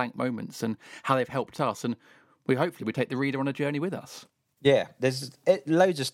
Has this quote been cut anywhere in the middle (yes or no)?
no